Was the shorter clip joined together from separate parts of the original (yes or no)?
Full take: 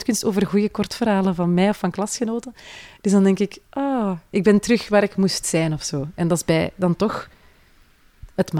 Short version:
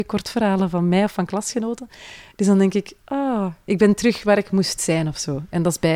no